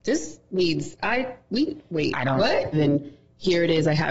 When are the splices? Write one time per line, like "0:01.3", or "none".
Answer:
0:02.7